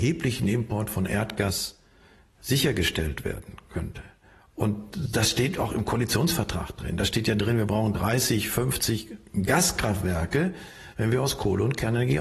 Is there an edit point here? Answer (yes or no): no